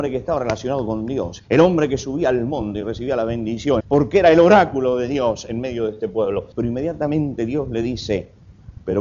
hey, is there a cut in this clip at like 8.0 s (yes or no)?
no